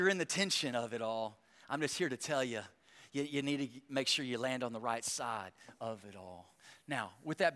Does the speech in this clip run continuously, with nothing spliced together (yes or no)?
yes